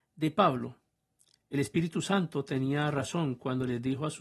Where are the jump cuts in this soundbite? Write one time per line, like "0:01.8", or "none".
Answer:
none